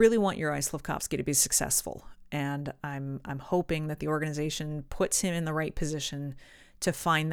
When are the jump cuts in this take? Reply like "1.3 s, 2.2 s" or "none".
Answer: none